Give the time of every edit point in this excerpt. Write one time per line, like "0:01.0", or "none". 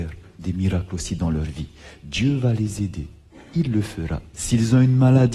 0:04.3